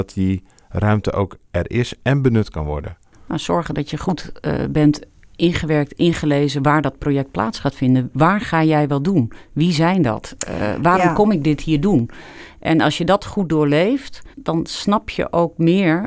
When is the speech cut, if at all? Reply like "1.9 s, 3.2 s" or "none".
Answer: 14.3 s